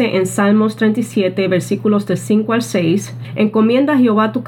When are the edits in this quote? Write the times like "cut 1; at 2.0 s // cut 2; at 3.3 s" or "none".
none